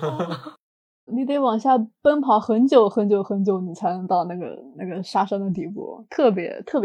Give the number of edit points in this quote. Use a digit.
1